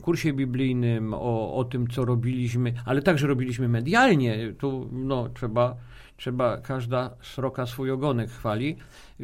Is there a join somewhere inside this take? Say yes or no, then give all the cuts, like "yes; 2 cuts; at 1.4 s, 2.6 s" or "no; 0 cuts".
no; 0 cuts